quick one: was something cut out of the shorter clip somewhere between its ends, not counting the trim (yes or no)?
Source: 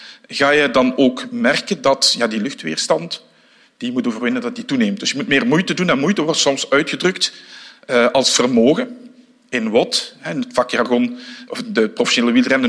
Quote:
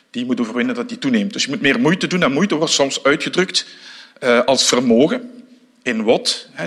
no